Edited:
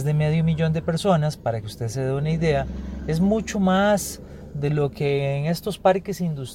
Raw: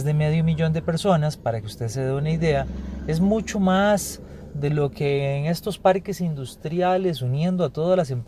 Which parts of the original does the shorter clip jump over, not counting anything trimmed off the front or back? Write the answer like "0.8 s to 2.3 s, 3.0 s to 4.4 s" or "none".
none